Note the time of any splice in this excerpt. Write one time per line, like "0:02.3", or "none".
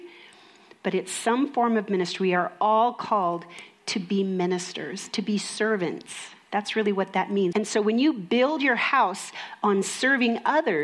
0:07.5